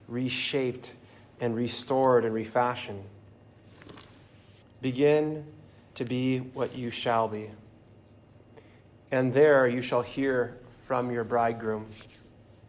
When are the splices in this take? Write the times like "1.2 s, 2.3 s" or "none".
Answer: 4.6 s